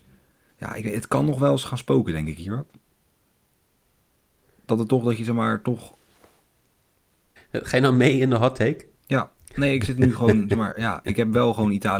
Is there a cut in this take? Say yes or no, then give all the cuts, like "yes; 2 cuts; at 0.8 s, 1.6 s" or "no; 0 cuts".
yes; 2 cuts; at 7.4 s, 9.0 s